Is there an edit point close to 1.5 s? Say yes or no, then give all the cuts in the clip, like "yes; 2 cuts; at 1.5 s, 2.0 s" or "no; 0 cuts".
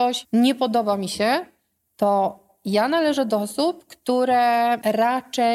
no; 0 cuts